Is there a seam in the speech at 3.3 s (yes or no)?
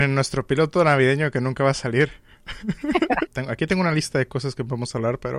yes